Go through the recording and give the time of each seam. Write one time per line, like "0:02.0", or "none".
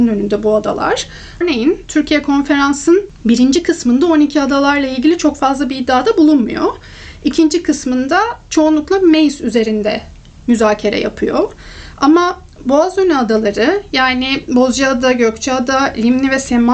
0:01.4